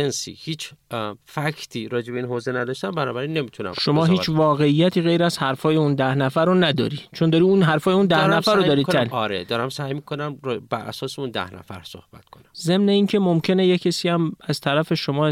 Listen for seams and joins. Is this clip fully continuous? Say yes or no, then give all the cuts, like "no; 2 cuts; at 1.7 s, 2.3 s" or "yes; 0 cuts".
no; 1 cut; at 1.2 s